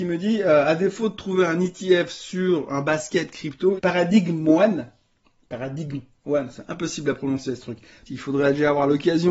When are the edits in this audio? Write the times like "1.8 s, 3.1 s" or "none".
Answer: 3.8 s, 8.1 s

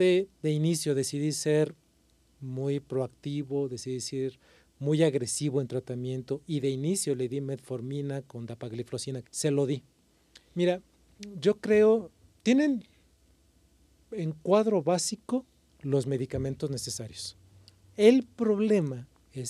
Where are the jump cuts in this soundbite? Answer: 9.2 s, 10.4 s

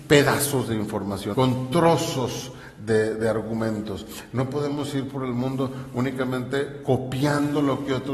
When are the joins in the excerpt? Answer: 1.3 s

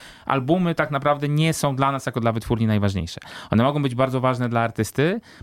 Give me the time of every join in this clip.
none

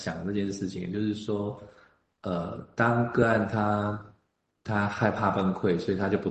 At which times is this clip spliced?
none

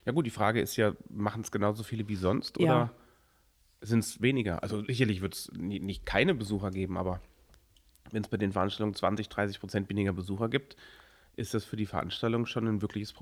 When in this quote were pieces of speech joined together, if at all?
none

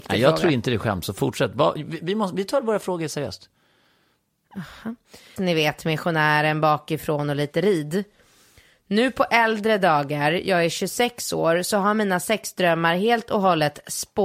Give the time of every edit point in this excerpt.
5.4 s

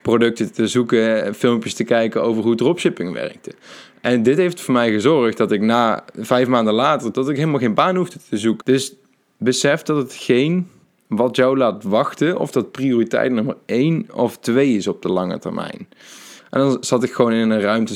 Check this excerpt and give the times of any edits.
7.1 s, 8.6 s, 16.4 s

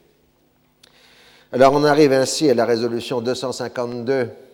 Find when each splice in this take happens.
none

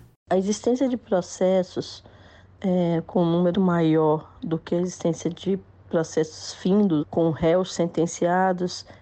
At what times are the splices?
3.5 s, 7.0 s

